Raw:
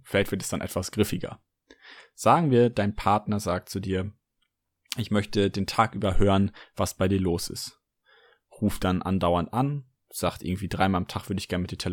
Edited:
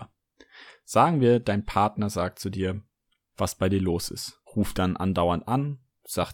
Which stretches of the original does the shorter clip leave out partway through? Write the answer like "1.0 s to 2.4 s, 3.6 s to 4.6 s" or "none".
4.6 s to 6.7 s, 7.8 s to 8.5 s